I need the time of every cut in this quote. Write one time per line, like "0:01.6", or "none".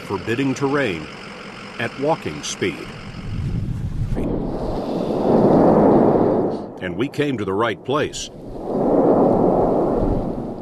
0:04.2